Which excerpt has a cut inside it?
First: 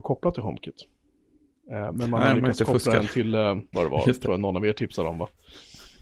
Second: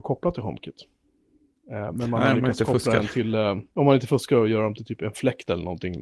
first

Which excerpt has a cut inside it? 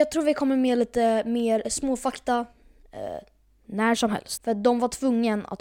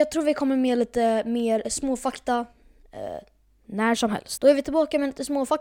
first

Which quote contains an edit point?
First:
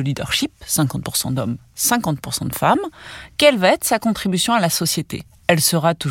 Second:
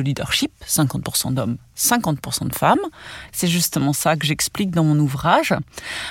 second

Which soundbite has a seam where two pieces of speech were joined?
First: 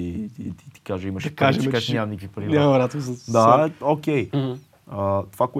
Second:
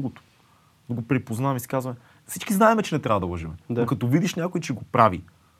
first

